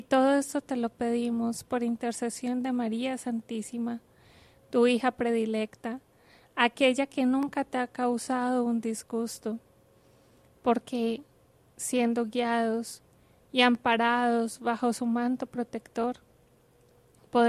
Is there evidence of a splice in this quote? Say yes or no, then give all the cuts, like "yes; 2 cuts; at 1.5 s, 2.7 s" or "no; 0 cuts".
no; 0 cuts